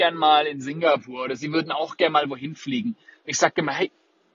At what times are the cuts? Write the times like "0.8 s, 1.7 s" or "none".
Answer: none

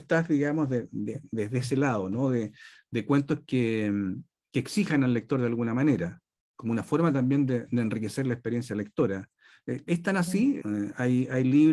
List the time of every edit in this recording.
10.6 s

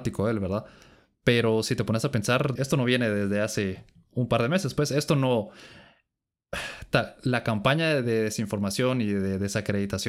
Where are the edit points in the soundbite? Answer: 2.6 s

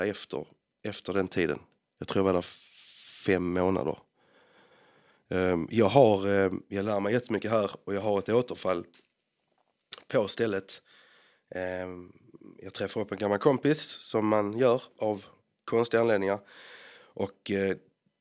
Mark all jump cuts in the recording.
none

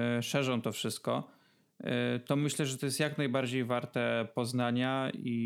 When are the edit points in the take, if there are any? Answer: none

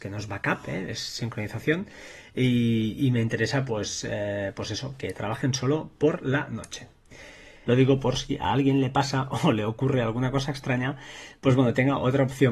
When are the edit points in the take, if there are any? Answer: none

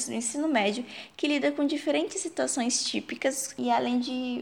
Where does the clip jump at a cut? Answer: none

